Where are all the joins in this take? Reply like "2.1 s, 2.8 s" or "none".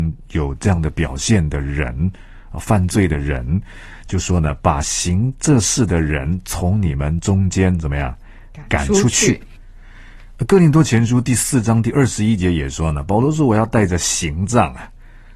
none